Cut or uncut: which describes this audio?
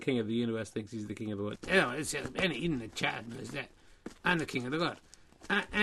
cut